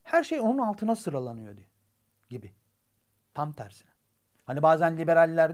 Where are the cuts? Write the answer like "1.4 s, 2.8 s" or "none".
none